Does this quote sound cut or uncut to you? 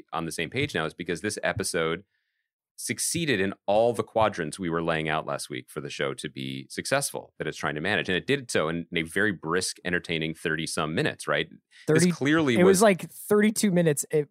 uncut